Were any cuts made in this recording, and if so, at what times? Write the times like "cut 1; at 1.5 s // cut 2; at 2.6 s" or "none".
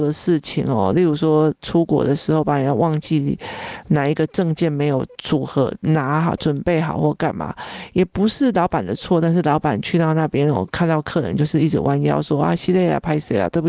none